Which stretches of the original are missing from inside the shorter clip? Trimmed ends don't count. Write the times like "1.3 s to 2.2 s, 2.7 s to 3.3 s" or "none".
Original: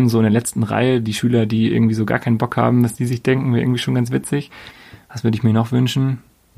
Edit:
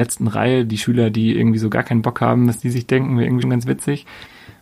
3.8 s to 3.9 s